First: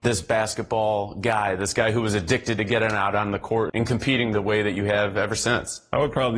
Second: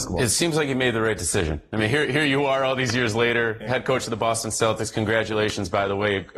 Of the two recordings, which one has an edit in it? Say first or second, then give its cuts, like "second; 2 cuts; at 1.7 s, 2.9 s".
first; 1 cut; at 3.7 s